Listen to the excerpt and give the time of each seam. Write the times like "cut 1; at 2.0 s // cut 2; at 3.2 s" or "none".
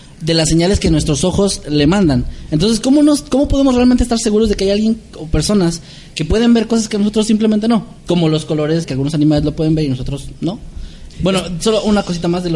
cut 1; at 8.8 s // cut 2; at 11.1 s